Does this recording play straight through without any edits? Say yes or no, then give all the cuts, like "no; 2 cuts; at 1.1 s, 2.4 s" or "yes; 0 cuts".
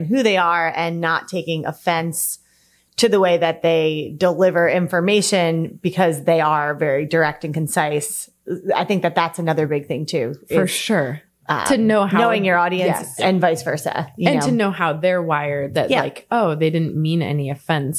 yes; 0 cuts